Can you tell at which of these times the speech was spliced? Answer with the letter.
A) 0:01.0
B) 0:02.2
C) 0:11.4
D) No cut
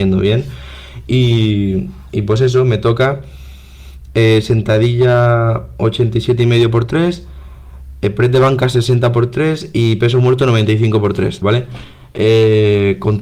C